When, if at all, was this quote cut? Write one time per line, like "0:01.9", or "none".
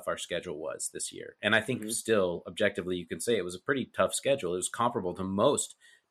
none